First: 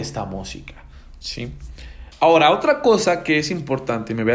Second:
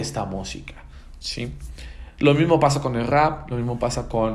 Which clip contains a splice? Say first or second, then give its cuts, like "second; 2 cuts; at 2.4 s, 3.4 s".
first; 1 cut; at 2.1 s